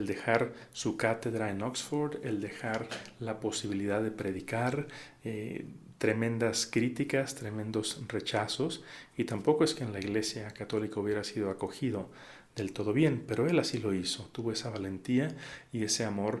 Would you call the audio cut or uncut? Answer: uncut